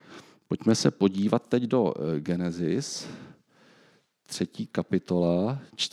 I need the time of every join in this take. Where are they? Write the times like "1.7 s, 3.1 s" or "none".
none